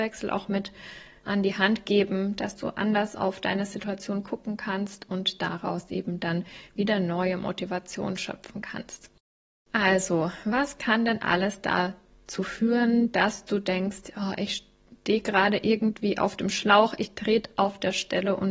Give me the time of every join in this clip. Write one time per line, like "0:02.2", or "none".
0:01.2

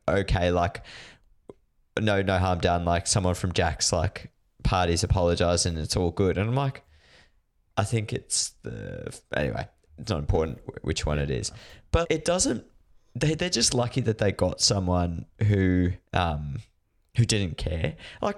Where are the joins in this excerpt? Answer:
0:12.0
0:16.1

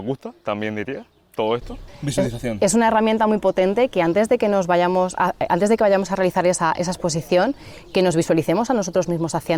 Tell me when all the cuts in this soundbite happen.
0:01.9

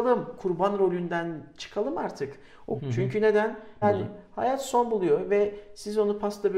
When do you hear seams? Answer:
0:02.8
0:03.8

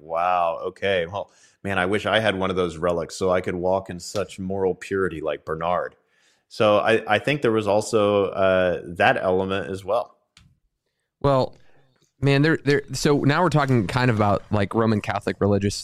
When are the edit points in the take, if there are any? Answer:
none

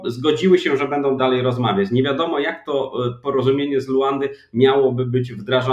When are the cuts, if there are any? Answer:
0:01.2

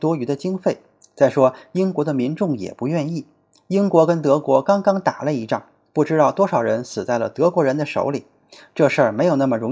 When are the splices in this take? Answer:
none

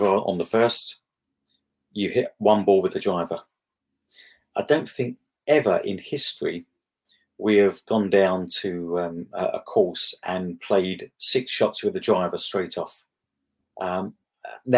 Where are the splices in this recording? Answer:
0:13.6

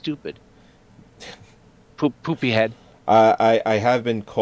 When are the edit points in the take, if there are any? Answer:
none

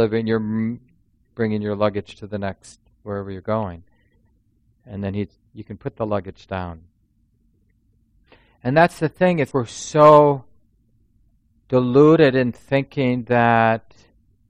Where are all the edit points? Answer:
0:05.5
0:09.5

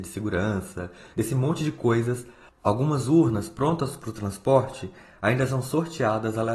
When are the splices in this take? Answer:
0:01.1

